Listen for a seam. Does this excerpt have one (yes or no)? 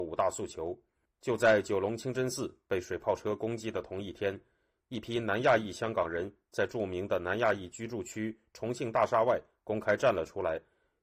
no